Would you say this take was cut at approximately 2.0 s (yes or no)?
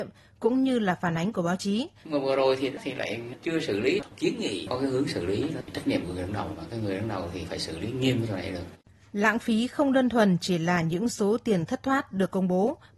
yes